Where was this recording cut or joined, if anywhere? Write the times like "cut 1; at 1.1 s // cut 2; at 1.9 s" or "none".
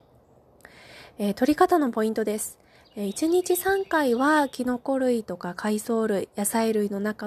none